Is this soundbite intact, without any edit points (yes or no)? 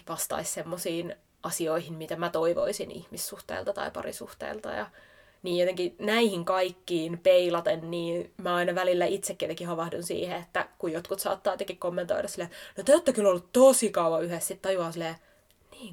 yes